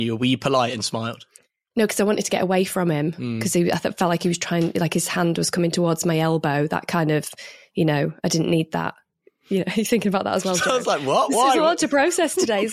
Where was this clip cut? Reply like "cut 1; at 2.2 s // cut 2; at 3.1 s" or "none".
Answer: none